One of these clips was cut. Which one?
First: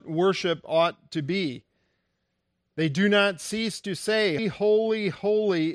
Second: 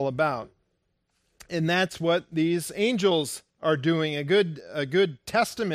first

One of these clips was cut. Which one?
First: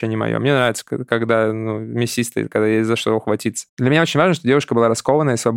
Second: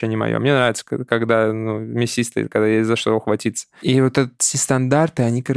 first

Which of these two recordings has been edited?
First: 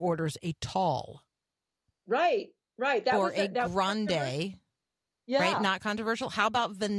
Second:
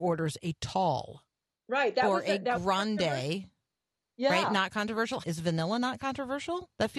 second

